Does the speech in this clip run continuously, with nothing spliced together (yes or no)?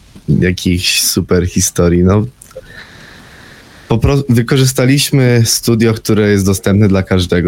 yes